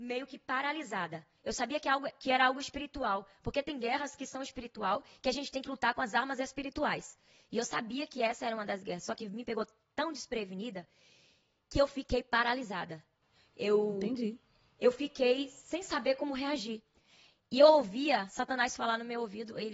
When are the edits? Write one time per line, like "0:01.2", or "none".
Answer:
none